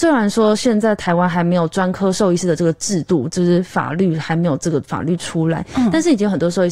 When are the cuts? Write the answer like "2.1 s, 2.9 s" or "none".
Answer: none